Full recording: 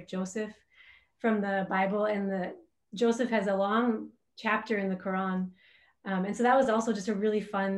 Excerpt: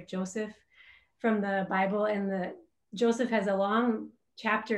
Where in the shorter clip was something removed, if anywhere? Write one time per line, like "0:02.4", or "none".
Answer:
none

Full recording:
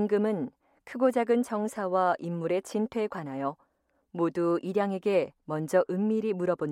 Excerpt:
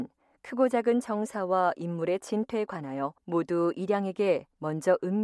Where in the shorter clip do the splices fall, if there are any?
0:03.2

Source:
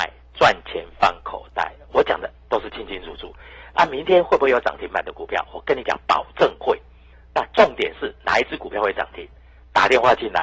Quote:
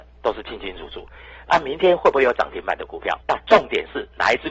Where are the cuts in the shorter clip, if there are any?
0:03.2

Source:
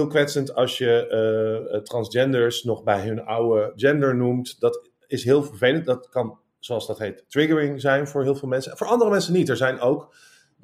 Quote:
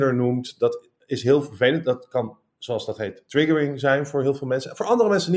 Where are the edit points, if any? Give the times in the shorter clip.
none

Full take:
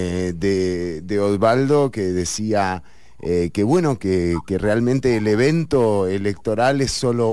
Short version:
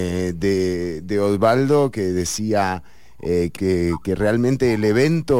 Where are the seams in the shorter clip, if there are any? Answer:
0:03.6

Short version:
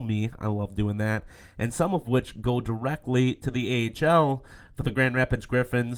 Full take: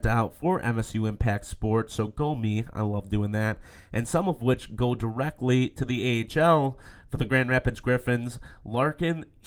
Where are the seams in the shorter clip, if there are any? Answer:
none

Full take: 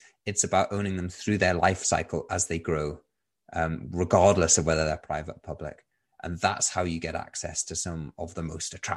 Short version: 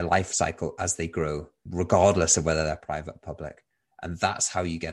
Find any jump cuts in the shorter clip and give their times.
0:01.7

